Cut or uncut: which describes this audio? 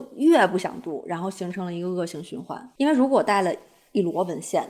cut